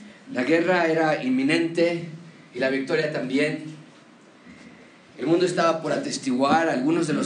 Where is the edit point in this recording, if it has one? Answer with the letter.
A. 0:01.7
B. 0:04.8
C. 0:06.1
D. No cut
D